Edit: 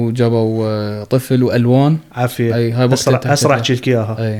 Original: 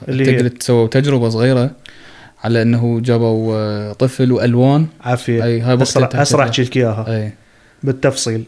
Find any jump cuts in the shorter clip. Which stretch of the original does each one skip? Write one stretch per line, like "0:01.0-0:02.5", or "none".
none